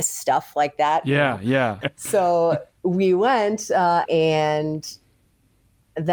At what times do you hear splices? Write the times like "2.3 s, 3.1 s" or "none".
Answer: 1.8 s, 4.0 s